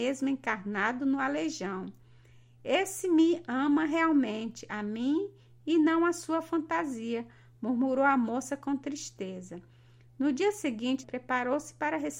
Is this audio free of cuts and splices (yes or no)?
no